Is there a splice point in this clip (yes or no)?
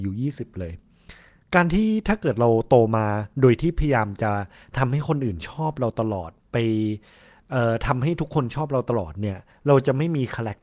no